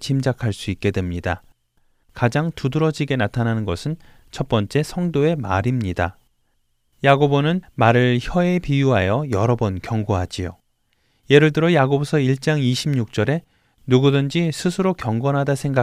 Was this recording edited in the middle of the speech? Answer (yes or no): no